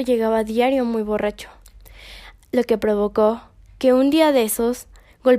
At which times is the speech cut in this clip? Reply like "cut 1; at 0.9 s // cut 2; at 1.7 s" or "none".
none